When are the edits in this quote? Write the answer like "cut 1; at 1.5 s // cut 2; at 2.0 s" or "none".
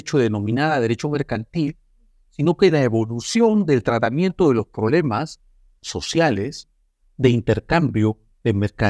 none